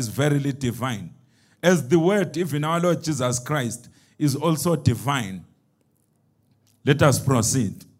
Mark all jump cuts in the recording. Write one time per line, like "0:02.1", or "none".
0:02.3